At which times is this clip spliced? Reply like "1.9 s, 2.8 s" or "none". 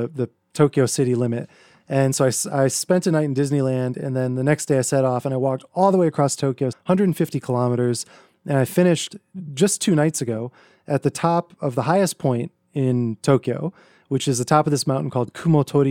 6.7 s